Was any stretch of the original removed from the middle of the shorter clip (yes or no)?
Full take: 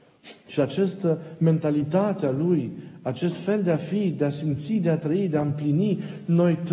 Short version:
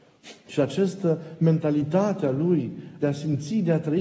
yes